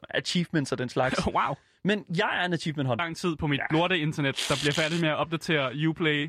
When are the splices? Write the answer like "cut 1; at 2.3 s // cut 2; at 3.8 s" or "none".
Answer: cut 1; at 3.0 s